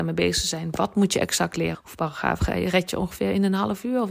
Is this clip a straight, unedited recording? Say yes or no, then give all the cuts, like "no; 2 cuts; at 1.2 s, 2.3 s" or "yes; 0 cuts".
no; 1 cut; at 1.7 s